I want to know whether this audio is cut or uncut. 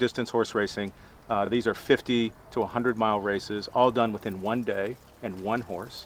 uncut